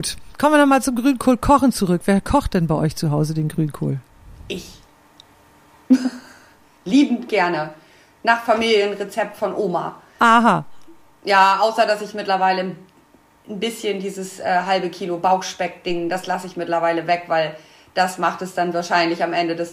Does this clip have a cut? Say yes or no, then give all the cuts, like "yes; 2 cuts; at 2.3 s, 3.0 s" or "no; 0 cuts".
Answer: no; 0 cuts